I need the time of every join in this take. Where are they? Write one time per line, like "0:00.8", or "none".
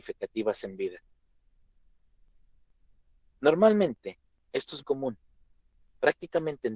0:04.8